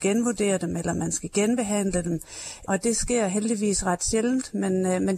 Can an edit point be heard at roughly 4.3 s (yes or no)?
no